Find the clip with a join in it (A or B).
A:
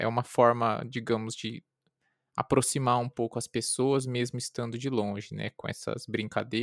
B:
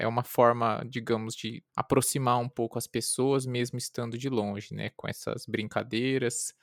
B